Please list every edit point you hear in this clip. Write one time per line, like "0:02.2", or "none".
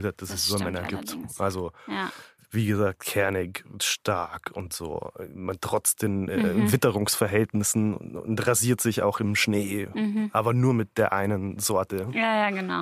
none